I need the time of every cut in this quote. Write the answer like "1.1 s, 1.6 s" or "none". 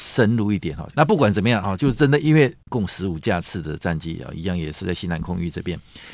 0.9 s, 2.6 s